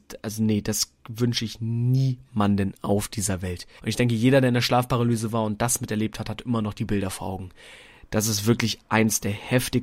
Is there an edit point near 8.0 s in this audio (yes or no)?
no